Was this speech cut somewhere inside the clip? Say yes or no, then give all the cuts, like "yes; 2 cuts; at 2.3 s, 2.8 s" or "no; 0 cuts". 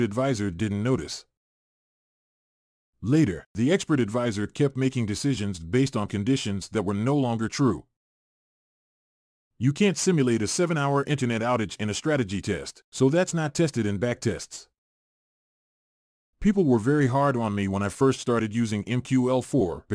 no; 0 cuts